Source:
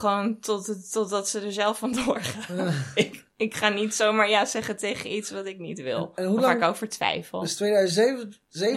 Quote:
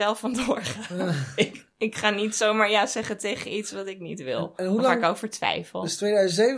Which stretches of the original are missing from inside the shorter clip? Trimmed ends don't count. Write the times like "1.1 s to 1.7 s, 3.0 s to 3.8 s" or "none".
none